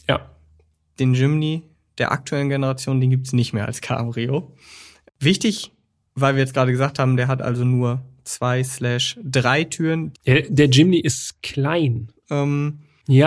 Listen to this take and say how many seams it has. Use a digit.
2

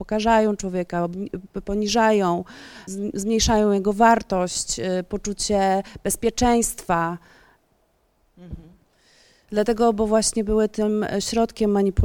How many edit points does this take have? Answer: 2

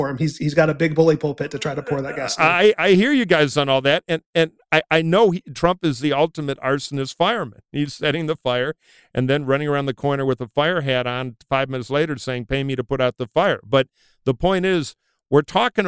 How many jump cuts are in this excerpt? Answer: 0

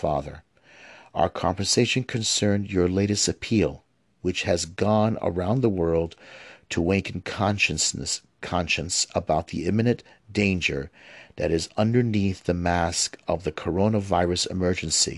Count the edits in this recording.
0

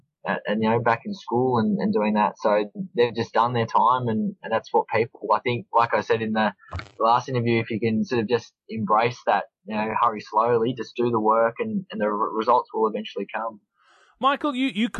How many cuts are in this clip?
0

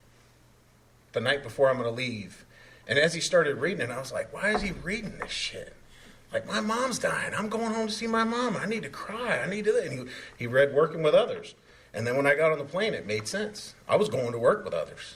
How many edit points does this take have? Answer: 0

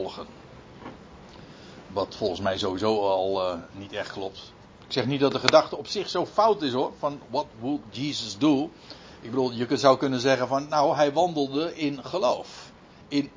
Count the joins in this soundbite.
0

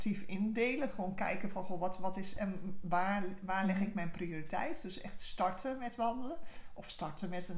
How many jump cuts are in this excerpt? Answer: 0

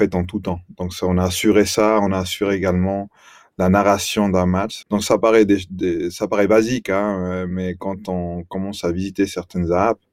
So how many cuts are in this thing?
1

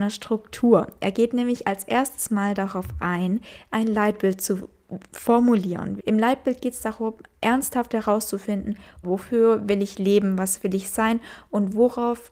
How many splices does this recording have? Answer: 2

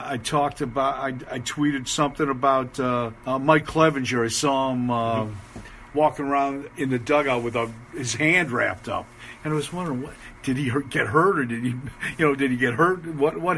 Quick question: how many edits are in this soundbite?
1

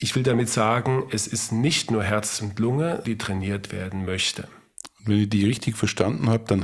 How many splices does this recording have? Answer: 1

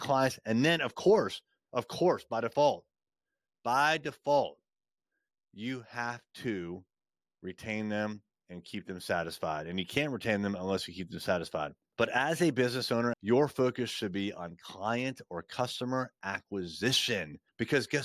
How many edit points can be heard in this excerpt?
1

